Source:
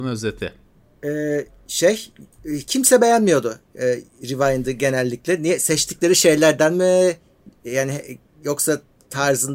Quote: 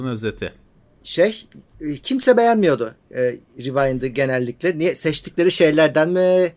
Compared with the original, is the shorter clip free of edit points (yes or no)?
no